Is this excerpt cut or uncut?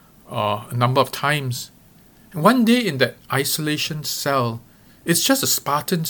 uncut